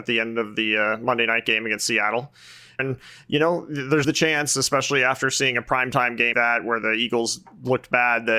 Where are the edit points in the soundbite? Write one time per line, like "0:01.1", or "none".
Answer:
0:02.8
0:04.0
0:06.3

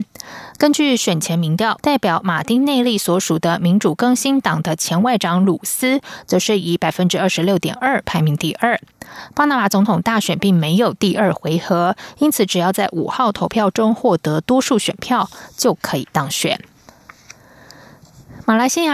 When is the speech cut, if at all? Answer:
0:01.8

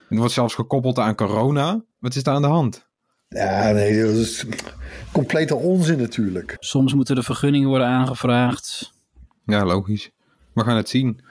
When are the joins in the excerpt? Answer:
0:01.9
0:06.6
0:09.3

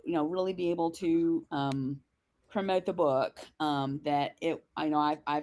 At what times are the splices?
none

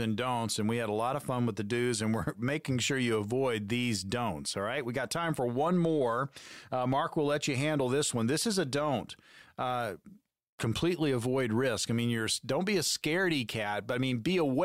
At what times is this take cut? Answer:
none

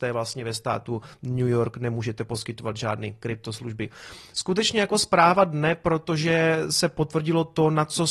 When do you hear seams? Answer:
none

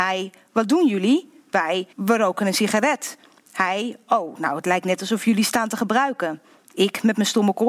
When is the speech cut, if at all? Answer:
0:01.9

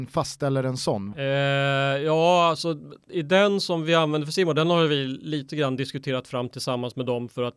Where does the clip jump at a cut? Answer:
0:01.1

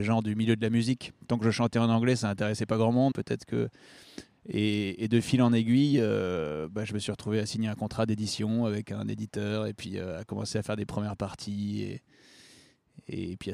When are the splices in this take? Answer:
0:03.1

